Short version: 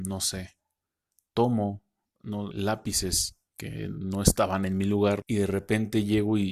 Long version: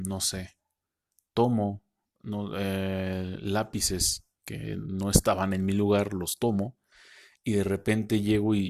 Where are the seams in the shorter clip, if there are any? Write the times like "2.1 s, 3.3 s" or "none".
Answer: 2.5 s, 5.2 s